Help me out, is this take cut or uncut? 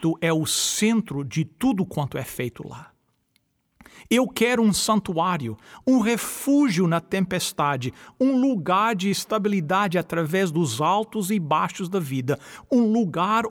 cut